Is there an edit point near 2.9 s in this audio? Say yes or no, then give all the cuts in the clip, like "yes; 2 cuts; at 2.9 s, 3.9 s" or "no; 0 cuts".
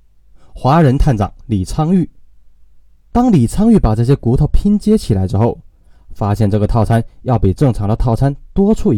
yes; 1 cut; at 2.9 s